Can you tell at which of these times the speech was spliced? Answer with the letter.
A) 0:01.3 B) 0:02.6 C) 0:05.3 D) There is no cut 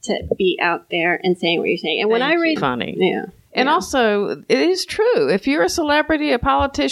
B